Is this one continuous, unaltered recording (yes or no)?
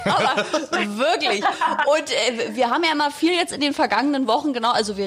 yes